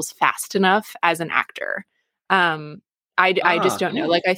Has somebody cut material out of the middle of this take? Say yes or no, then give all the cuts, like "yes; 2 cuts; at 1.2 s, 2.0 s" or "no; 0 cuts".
no; 0 cuts